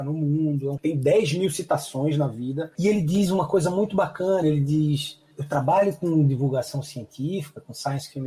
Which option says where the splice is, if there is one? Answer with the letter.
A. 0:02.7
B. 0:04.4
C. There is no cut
C